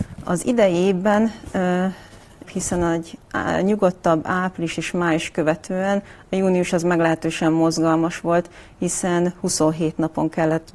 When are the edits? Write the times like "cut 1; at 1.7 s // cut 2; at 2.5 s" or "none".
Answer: cut 1; at 2.4 s